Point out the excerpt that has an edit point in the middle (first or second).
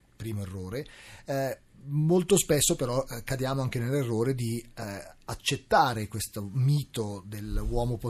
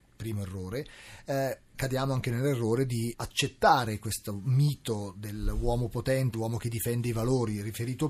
second